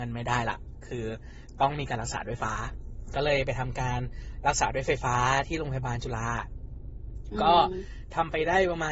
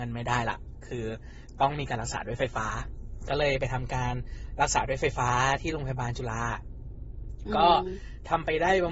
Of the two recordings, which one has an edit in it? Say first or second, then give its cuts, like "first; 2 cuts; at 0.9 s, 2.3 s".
first; 1 cut; at 2.4 s